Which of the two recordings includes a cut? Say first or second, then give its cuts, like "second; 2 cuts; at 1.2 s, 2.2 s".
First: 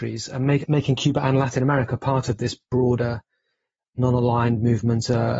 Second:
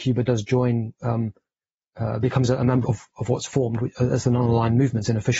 second; 1 cut; at 2.8 s